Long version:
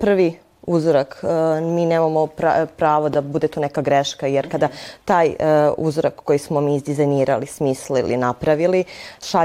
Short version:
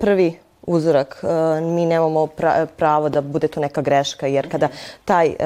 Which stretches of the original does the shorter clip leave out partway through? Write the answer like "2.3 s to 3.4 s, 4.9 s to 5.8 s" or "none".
none